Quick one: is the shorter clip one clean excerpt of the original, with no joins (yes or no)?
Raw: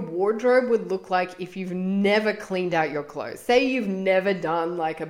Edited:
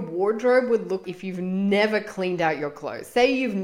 no